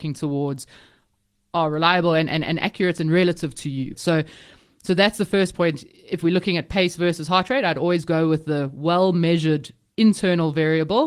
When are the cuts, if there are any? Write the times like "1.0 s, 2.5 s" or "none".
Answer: 3.9 s